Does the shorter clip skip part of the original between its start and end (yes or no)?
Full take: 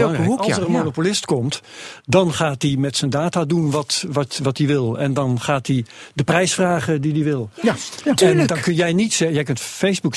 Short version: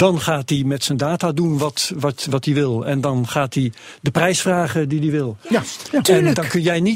no